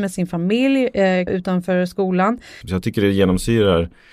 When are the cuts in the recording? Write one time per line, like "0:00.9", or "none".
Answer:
0:01.3
0:02.6